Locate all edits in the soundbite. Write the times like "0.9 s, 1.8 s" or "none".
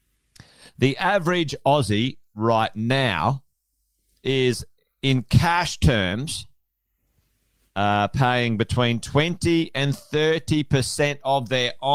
none